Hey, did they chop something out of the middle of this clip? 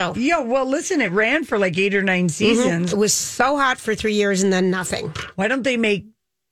yes; 1 cut; at 2.9 s

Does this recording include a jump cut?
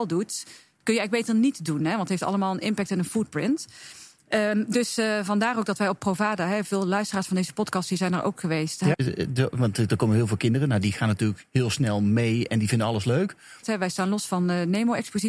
yes; 2 cuts; at 8.9 s, 13.6 s

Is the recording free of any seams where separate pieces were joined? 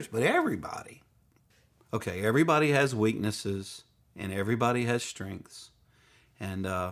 yes; 0 cuts

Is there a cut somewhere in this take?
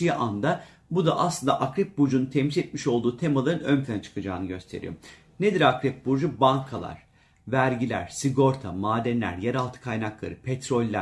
no; 0 cuts

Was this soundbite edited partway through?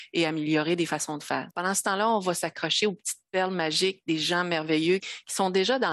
yes; 2 cuts; at 1.5 s, 5.0 s

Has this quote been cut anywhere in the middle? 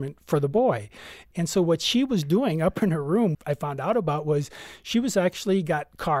yes; 2 cuts; at 1.3 s, 3.3 s

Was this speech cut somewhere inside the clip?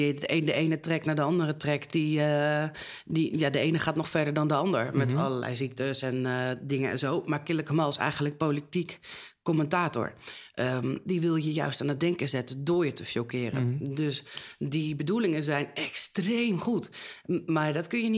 no; 0 cuts

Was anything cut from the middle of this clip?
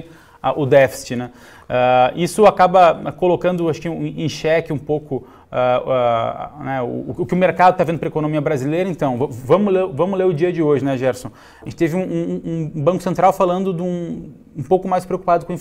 no; 0 cuts

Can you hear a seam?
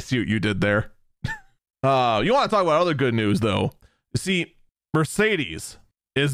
no; 0 cuts

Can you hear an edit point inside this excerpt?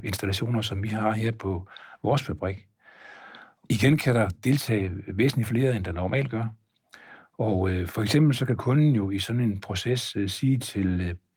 no; 0 cuts

